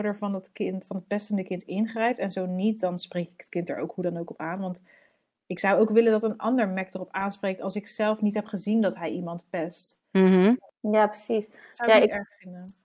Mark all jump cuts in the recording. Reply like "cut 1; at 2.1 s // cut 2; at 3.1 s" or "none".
none